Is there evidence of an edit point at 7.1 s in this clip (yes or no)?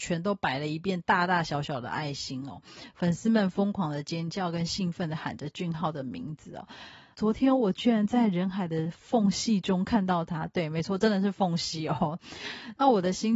yes